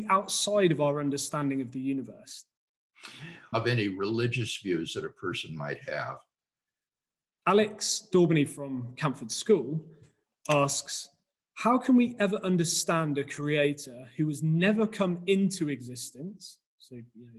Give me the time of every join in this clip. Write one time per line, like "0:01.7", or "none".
0:03.5